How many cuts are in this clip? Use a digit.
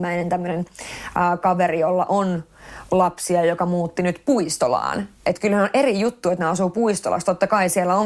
0